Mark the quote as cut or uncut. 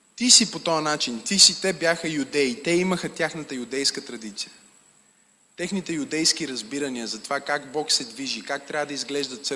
uncut